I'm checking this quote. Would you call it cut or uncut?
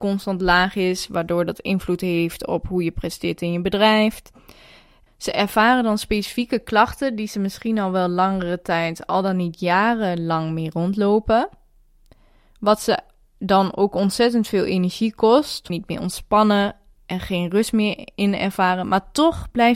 cut